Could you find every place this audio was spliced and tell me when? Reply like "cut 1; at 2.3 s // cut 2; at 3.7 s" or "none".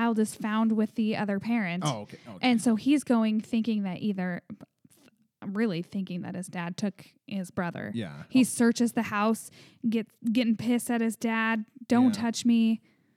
none